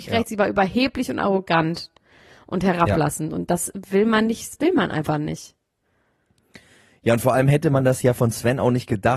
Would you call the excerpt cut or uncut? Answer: uncut